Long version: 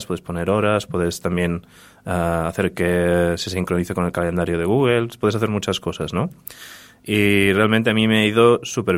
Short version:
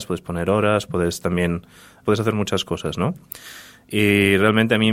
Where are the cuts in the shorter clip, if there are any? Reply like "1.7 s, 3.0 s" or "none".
2.0 s